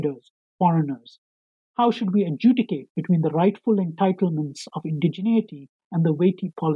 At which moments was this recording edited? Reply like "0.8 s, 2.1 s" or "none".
none